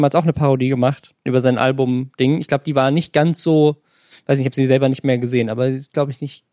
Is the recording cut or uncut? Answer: uncut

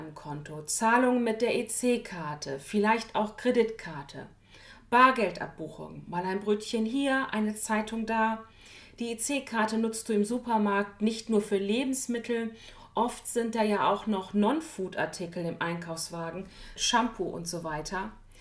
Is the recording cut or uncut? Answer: cut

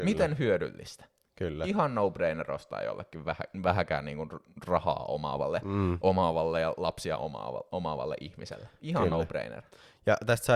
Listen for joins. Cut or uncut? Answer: uncut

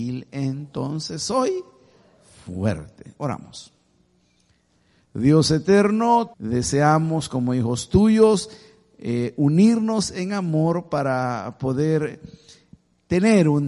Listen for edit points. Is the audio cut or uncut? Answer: cut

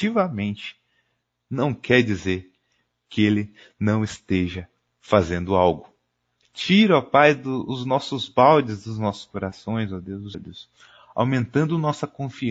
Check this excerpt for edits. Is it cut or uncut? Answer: cut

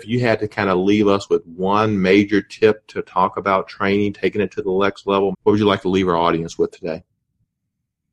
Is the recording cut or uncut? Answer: cut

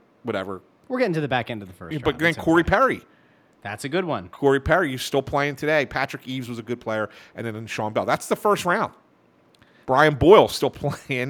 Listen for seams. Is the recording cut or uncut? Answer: cut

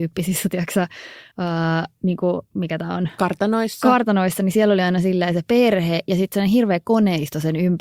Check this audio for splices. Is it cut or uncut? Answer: uncut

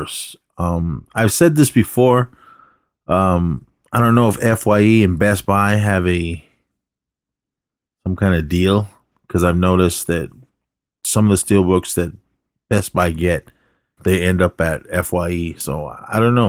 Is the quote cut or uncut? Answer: cut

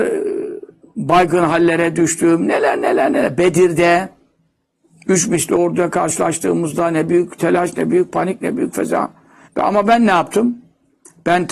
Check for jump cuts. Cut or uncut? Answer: cut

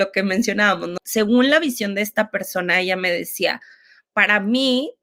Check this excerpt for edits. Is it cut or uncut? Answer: cut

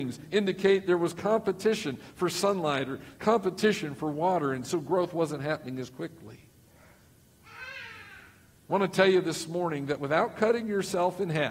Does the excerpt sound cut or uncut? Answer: uncut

